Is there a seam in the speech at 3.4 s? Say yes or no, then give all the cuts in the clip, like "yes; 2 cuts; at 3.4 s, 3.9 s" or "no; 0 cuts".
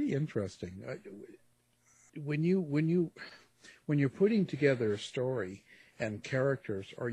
no; 1 cut; at 2.1 s